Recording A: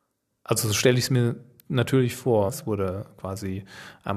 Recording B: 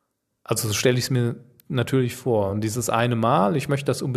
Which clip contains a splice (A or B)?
A